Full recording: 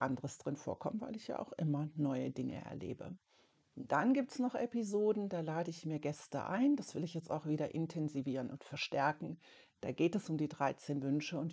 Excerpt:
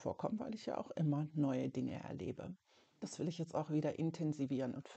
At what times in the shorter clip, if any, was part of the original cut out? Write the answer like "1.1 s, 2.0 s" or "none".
3.0 s